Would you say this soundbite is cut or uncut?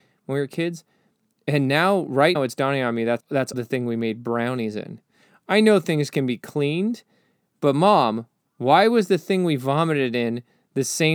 cut